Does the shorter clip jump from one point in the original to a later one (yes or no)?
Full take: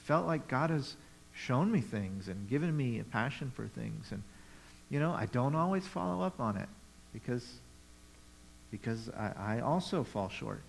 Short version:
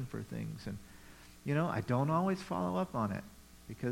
no